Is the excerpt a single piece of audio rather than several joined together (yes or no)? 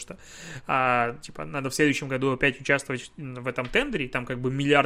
yes